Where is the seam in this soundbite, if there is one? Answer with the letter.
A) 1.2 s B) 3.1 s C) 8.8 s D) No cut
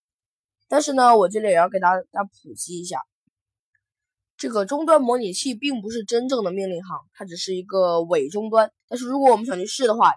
C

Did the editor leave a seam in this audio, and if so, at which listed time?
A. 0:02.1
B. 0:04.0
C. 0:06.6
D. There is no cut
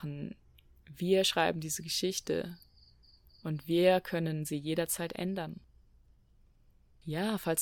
D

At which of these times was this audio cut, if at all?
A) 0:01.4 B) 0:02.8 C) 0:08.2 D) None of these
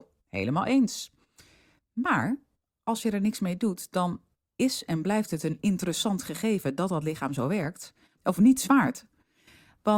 C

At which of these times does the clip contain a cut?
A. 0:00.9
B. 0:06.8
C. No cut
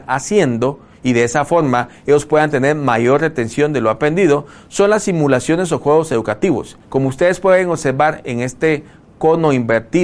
B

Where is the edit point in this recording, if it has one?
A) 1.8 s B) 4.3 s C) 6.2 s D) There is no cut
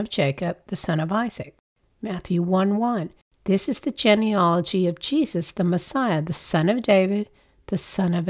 A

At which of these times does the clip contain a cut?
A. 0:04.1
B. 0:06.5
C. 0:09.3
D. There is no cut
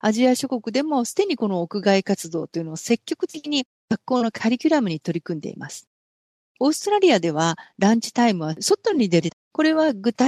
C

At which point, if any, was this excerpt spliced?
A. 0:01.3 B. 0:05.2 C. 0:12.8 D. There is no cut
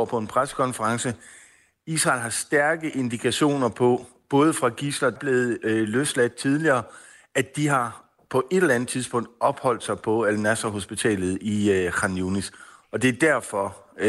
B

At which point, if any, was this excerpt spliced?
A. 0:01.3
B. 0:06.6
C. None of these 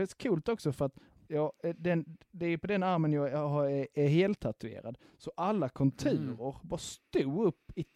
A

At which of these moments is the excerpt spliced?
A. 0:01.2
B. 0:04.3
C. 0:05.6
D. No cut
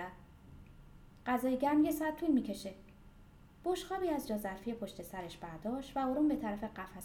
A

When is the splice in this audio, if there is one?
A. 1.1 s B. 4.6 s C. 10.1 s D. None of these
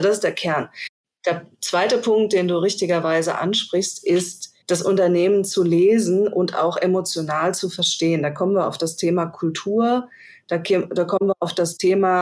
B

